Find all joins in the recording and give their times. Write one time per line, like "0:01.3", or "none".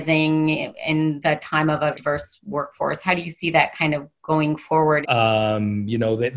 0:01.9
0:05.0